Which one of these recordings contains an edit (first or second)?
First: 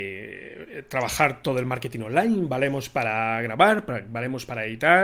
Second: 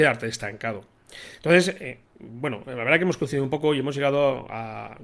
second